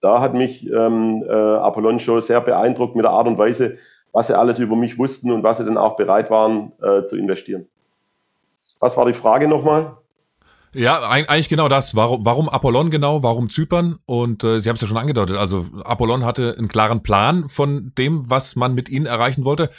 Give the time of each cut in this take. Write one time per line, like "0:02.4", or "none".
none